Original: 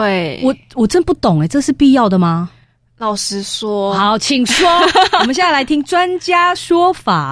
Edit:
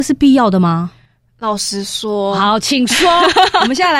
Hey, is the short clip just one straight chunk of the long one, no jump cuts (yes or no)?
yes